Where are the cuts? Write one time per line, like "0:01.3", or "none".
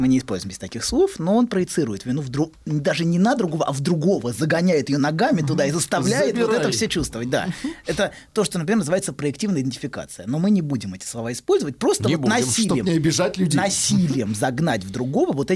none